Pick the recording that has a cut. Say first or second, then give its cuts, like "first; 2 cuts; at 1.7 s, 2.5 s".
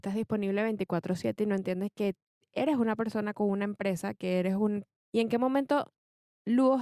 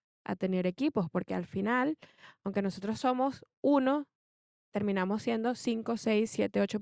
first; 1 cut; at 5.0 s